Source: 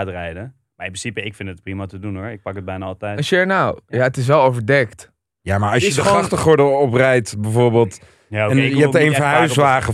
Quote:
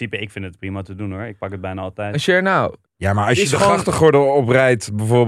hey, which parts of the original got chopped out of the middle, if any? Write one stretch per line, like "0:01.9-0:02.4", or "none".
0:03.9-0:05.3